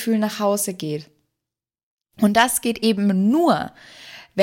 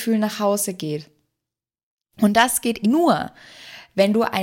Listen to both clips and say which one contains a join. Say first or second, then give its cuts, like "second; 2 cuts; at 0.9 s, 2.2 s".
second; 1 cut; at 2.8 s